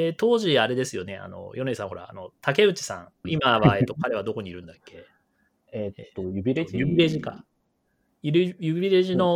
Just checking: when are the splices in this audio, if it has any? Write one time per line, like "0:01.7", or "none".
0:03.2